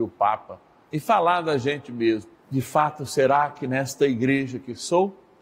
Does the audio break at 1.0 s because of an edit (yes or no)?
no